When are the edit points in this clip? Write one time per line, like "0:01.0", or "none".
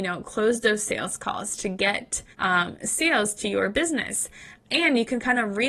0:02.3